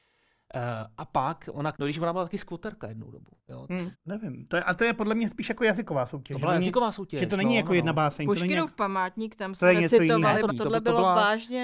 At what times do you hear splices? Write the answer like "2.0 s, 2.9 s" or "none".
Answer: 1.7 s, 3.9 s, 10.5 s